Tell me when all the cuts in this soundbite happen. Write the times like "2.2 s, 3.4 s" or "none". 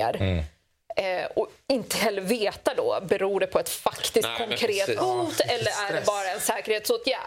none